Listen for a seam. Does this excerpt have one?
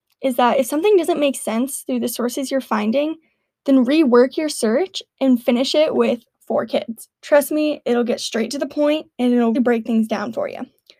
yes; 2 cuts; at 7.1 s, 9.5 s

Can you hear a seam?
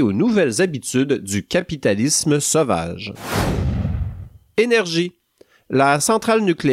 no; 0 cuts

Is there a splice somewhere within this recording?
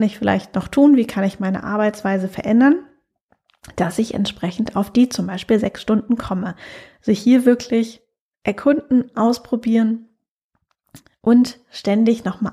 no; 0 cuts

